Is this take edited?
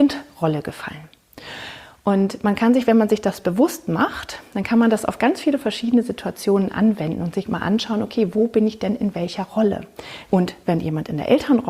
yes; 1 cut; at 10.3 s

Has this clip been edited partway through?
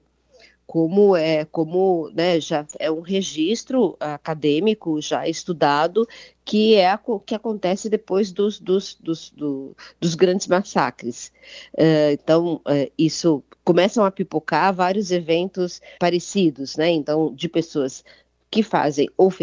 yes; 1 cut; at 16.0 s

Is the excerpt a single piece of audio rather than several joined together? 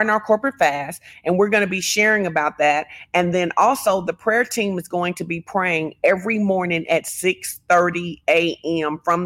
yes; 0 cuts

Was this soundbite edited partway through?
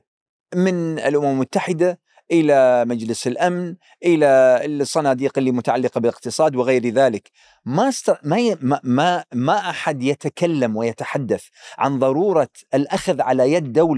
no; 0 cuts

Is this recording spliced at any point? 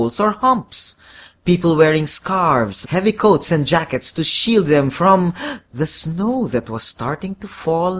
yes; 1 cut; at 2.8 s

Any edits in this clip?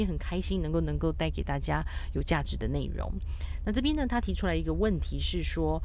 no; 0 cuts

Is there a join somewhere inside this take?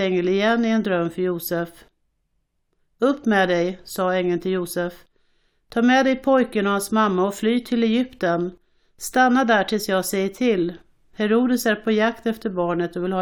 no; 0 cuts

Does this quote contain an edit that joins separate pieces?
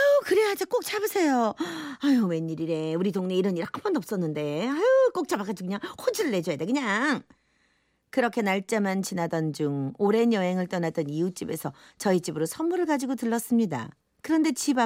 no; 0 cuts

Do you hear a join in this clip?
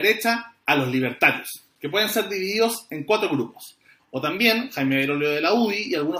yes; 1 cut; at 4.0 s

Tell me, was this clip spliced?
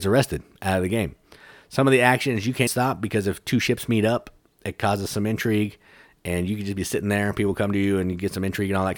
yes; 2 cuts; at 1.6 s, 2.7 s

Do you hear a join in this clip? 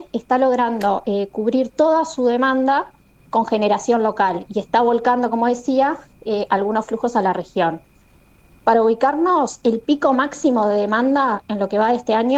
no; 0 cuts

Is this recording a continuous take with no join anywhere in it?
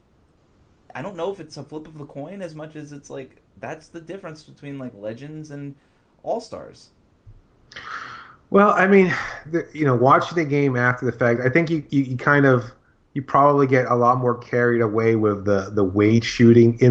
yes; 0 cuts

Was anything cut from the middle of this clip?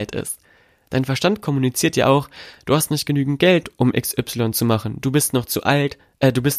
no; 0 cuts

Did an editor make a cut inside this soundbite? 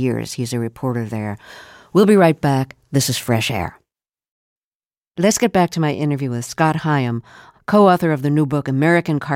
no; 0 cuts

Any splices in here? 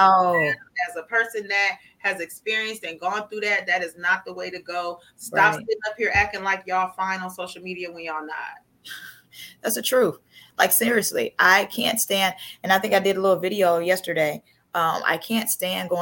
no; 0 cuts

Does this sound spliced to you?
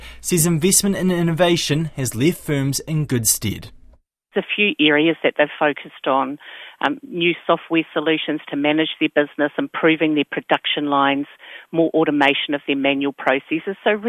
no; 0 cuts

